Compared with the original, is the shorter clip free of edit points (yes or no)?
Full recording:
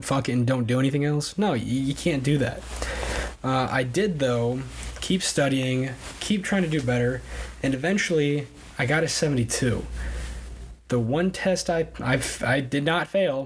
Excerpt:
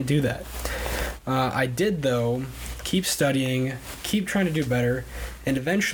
yes